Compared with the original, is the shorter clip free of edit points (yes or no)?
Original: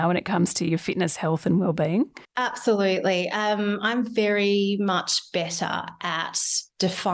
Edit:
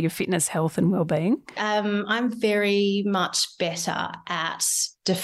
no